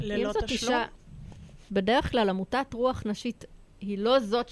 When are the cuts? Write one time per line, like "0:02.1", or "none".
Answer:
0:01.7